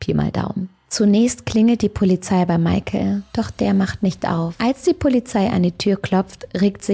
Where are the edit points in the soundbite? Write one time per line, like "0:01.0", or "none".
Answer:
0:03.3